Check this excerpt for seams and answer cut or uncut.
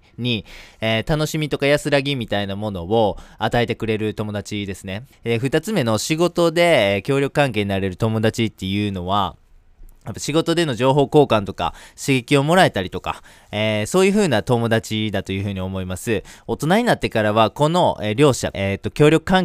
cut